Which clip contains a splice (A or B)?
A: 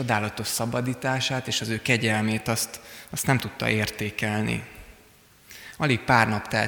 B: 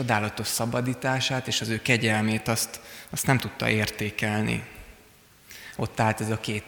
B